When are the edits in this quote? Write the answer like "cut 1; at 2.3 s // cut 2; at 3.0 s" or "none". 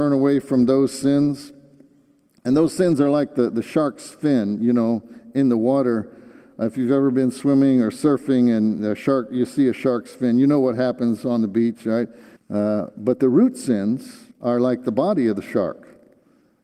cut 1; at 12.4 s // cut 2; at 14.3 s